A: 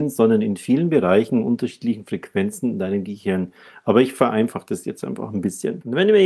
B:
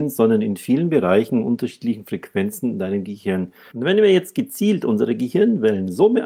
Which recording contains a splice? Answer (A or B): B